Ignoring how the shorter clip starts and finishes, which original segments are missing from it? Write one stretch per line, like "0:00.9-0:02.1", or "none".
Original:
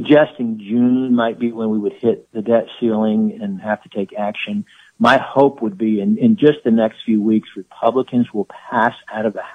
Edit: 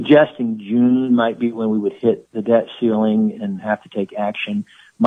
none